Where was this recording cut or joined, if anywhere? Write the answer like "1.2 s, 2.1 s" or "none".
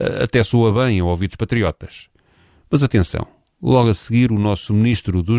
none